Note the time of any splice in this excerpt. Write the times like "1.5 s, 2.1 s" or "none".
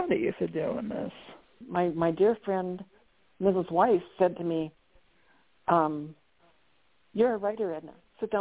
1.6 s